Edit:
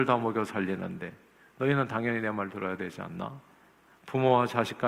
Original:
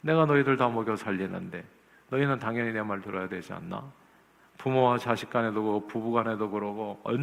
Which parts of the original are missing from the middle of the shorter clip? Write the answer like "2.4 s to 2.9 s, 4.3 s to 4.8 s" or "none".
none